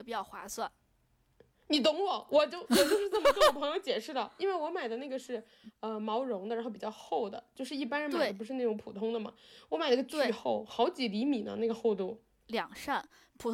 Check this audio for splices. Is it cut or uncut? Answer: cut